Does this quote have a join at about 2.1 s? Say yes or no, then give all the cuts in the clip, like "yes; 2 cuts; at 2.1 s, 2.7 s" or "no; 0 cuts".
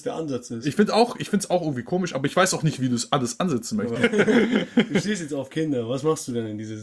no; 1 cut; at 4.0 s